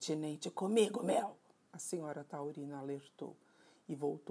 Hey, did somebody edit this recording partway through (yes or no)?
yes